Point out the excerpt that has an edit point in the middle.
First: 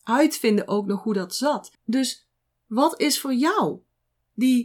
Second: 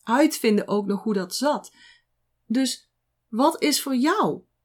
first; 1 cut; at 1.7 s

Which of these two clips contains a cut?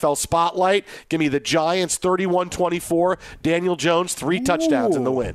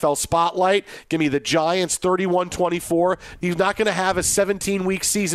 second; 1 cut; at 3.4 s

